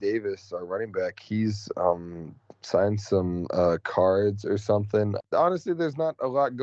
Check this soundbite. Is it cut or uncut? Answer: cut